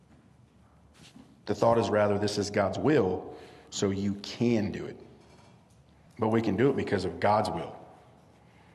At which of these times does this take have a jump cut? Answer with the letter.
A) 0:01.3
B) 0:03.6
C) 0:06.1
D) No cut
C